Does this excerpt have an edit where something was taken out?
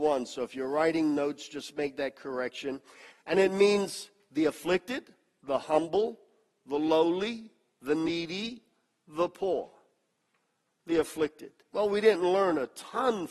yes; 1 cut; at 3.1 s

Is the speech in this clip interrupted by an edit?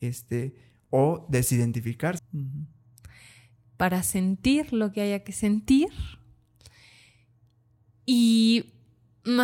yes; 1 cut; at 2.2 s

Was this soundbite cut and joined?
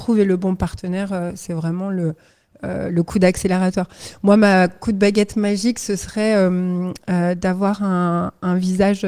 no; 0 cuts

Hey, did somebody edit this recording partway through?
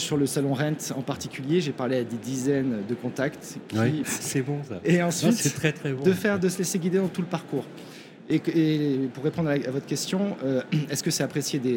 yes; 1 cut; at 4.0 s

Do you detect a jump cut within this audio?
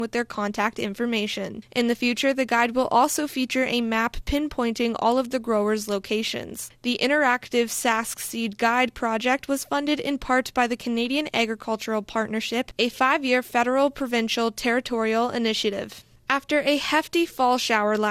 no; 0 cuts

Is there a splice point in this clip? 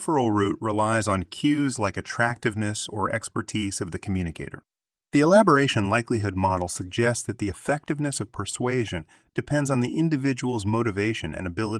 no; 0 cuts

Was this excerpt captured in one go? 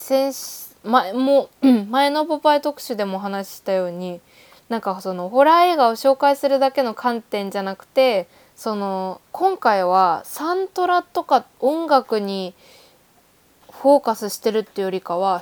no; 1 cut; at 9.2 s

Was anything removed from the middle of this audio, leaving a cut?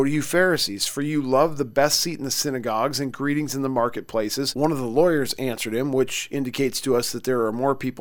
yes; 1 cut; at 4.5 s

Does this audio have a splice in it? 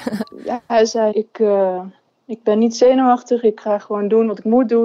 yes; 1 cut; at 1.1 s

